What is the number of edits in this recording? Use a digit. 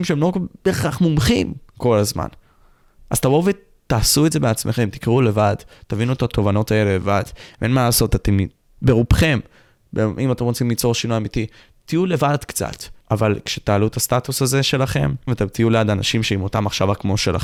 2